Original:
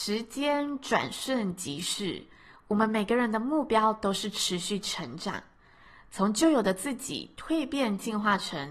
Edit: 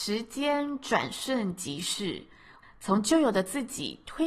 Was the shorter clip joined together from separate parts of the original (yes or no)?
yes